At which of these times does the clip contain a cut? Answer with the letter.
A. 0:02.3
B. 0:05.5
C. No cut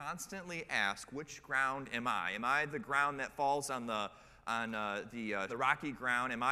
B